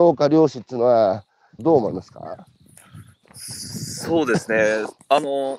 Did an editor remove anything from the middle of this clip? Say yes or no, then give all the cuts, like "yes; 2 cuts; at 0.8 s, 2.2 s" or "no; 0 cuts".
yes; 1 cut; at 1.6 s